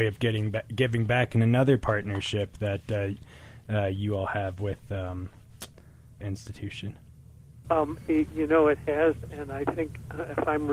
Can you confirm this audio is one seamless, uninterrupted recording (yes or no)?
no